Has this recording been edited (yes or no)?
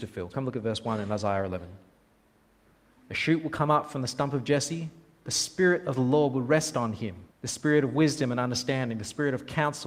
yes